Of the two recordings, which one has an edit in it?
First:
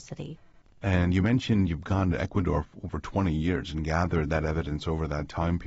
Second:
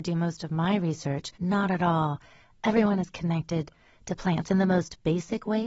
second; 1 cut; at 1.3 s

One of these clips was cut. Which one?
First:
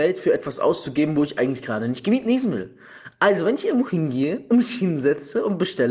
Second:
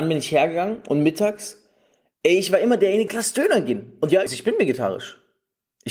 second; 2 cuts; at 3.1 s, 4.3 s

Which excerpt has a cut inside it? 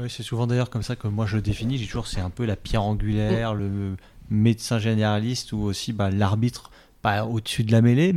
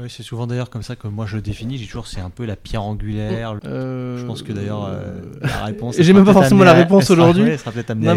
second; 1 cut; at 3.6 s

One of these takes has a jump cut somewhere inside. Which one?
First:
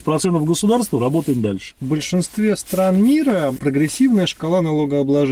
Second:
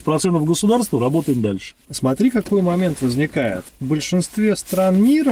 first; 1 cut; at 1.8 s

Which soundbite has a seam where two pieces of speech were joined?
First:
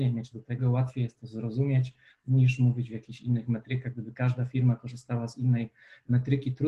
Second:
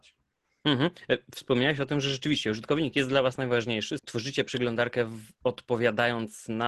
second; 1 cut; at 4.0 s

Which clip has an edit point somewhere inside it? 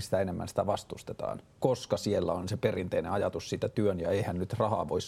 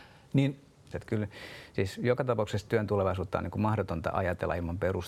second; 1 cut; at 0.9 s

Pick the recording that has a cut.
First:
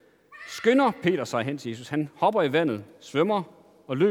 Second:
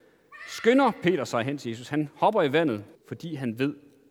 second; 1 cut; at 2.9 s

